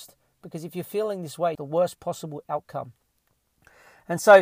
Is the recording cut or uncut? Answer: cut